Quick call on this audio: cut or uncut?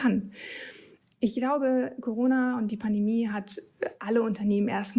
uncut